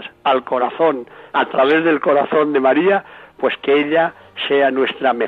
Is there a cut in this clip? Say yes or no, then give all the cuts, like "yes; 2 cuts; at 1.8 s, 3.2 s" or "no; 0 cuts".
yes; 1 cut; at 1.3 s